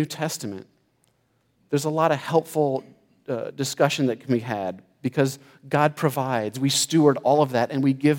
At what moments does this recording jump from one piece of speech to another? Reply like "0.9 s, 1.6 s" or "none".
6.5 s